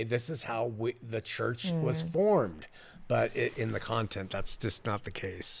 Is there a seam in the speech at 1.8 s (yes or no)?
no